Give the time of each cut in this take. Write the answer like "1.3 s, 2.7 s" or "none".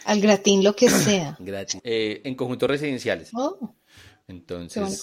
1.8 s, 3.3 s